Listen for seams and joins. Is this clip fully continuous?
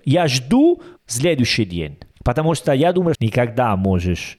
no; 1 cut; at 3.1 s

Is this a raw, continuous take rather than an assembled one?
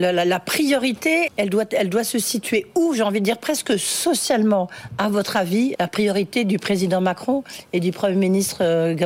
no; 2 cuts; at 1.3 s, 5.7 s

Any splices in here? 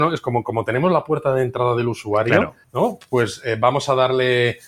no; 0 cuts

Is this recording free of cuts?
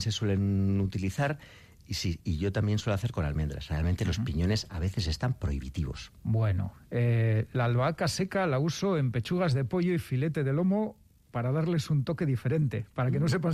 yes; 0 cuts

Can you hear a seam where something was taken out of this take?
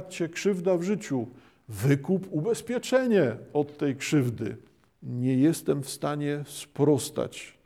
yes; 1 cut; at 4.9 s

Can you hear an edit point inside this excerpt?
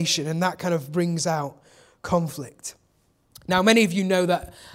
yes; 1 cut; at 3.3 s

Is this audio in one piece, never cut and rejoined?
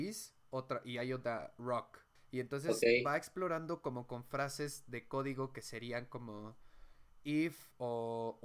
no; 1 cut; at 2.2 s

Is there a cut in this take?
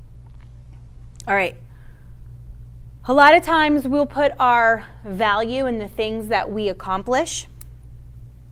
yes; 1 cut; at 3.0 s

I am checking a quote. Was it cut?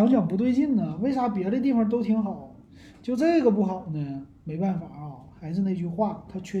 no; 0 cuts

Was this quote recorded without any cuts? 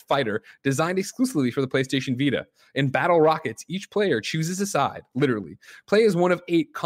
yes; 0 cuts

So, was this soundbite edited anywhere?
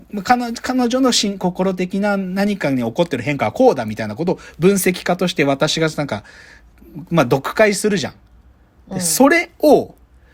no; 0 cuts

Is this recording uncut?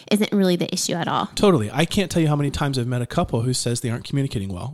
yes; 0 cuts

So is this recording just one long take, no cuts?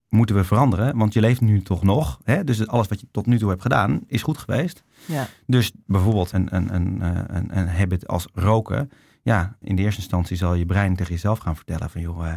no; 2 cuts; at 6.3 s, 9.6 s

